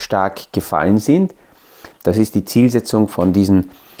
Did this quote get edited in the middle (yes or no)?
yes